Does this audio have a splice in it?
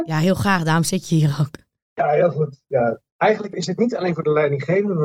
no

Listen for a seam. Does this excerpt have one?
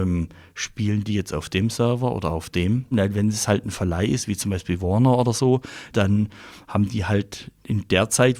yes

